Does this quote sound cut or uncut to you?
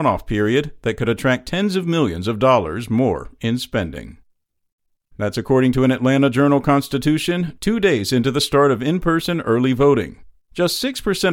cut